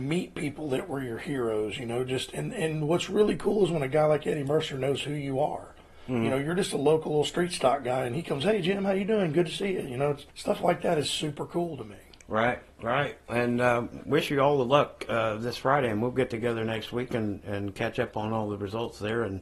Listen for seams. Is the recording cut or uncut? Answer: cut